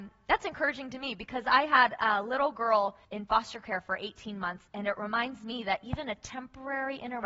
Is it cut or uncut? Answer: cut